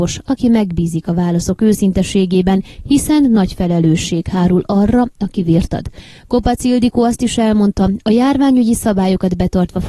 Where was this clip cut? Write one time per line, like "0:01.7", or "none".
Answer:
none